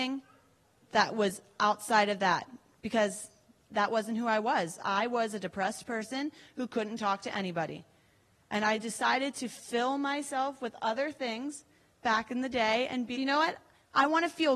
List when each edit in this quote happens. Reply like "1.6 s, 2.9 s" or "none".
13.1 s